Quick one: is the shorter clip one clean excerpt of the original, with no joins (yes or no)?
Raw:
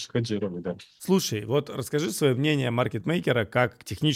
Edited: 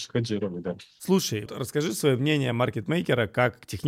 no